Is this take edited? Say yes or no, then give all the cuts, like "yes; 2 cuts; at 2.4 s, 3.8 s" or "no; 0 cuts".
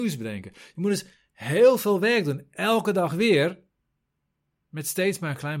no; 0 cuts